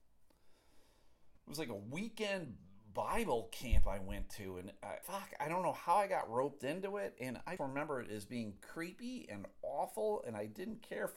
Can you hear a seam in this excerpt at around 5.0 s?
yes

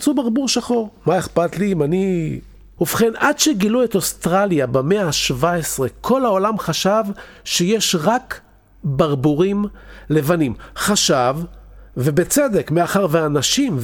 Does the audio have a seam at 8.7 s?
no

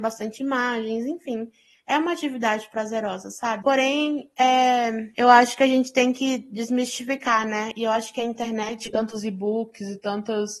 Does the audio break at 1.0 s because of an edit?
no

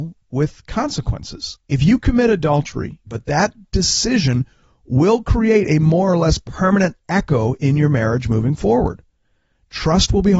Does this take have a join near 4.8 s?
no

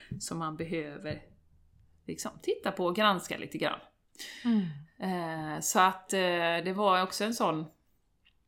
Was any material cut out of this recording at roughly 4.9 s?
no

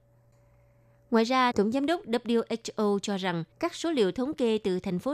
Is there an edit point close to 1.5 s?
yes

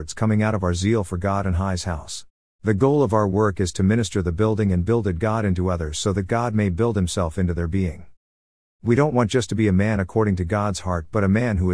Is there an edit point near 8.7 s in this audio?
yes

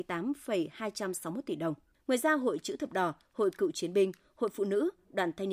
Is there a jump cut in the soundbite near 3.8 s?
no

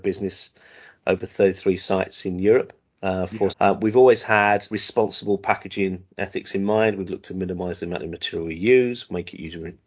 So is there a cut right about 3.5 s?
yes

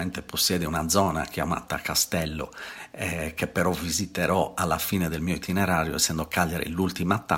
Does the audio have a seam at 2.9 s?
no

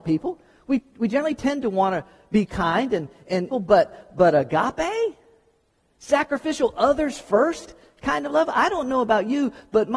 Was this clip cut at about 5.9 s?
no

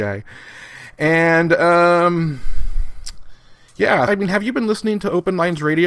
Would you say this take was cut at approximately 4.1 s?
yes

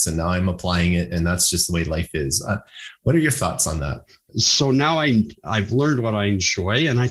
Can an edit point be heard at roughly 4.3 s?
yes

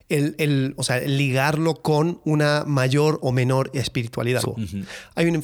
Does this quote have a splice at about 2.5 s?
no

